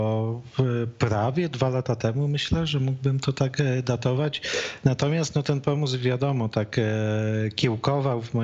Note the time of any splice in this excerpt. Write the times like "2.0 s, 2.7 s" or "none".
none